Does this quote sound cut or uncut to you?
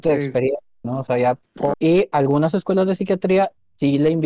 cut